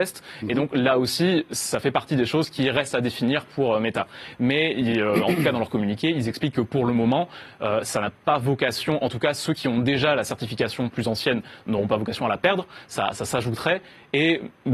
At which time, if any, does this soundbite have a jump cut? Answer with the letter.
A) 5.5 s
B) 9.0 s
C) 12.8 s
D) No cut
D